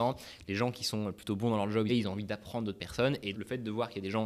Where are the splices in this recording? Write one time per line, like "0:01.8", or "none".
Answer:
0:01.9
0:03.3